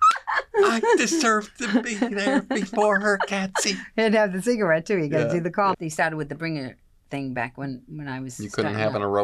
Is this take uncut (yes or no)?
no